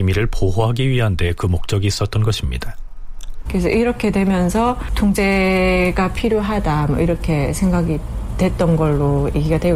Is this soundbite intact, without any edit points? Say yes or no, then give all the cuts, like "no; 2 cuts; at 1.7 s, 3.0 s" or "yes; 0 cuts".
no; 1 cut; at 3.4 s